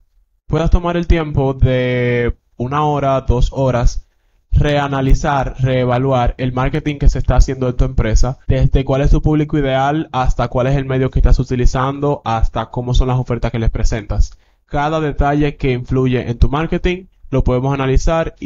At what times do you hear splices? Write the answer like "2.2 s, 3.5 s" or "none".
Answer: 8.4 s

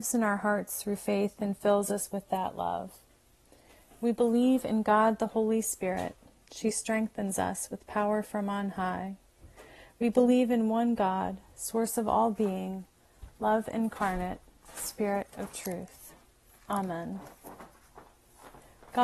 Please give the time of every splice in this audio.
none

